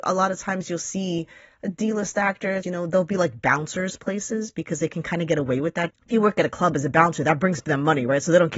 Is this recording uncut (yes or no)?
no